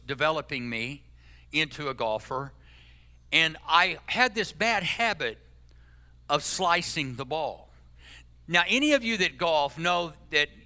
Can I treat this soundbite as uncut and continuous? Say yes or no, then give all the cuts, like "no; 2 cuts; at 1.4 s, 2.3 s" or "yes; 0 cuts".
yes; 0 cuts